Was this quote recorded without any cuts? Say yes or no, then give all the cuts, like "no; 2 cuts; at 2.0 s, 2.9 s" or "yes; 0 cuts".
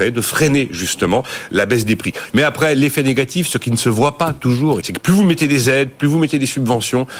no; 2 cuts; at 2.3 s, 4.8 s